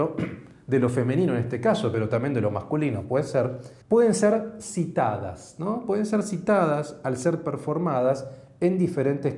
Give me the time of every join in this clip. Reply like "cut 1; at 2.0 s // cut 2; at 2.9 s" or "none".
cut 1; at 3.8 s

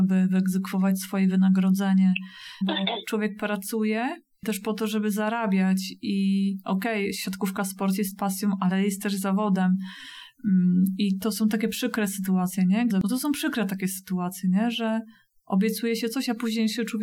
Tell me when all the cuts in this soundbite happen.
cut 1; at 2.6 s // cut 2; at 12.9 s

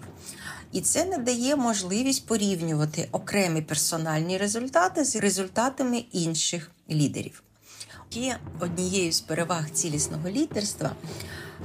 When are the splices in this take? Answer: cut 1; at 8.1 s

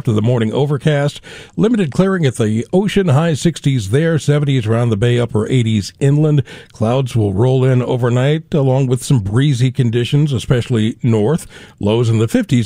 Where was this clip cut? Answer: none

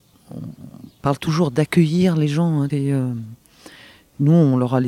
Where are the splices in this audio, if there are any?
cut 1; at 2.7 s

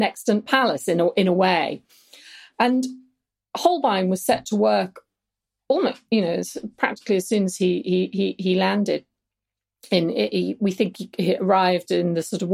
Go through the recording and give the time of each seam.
none

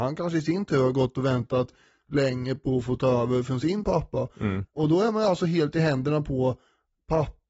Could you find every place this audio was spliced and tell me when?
cut 1; at 4.7 s

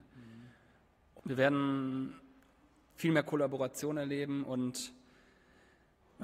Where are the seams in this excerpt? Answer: cut 1; at 1.2 s

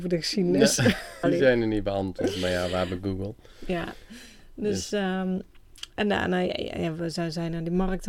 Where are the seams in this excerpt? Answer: cut 1; at 1.2 s

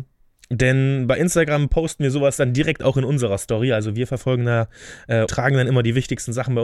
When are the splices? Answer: cut 1; at 5.3 s

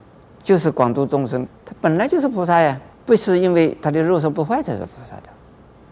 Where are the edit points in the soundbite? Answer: cut 1; at 1.5 s // cut 2; at 2.9 s

